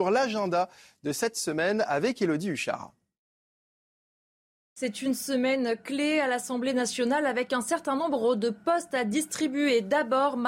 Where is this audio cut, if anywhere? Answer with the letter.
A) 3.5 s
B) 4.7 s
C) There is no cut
C